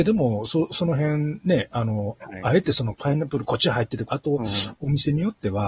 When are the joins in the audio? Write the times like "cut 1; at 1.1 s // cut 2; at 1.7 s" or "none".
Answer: cut 1; at 4.1 s